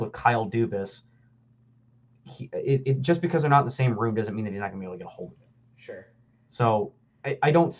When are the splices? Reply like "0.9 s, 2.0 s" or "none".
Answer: none